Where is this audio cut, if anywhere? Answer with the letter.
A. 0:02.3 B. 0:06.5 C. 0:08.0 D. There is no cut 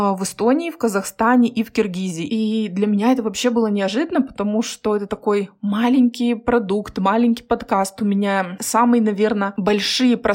A